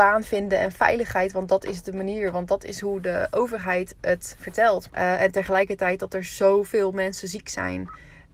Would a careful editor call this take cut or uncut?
cut